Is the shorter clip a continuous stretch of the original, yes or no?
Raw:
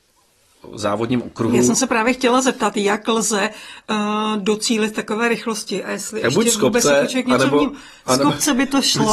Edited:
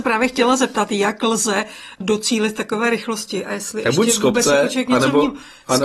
no